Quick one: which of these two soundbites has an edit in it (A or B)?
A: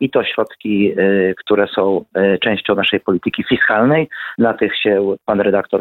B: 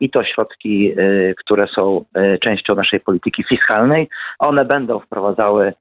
B